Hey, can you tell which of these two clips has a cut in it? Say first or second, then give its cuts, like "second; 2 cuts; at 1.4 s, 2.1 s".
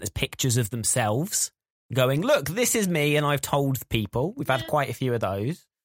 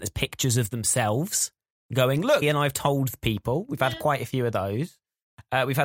second; 1 cut; at 2.4 s